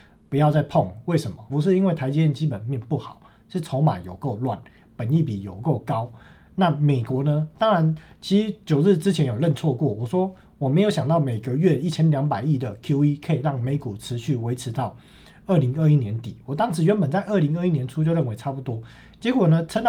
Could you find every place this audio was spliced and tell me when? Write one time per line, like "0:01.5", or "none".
0:01.5